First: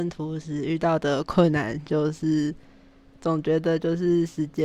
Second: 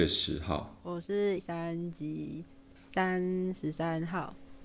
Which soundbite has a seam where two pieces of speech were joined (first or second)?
second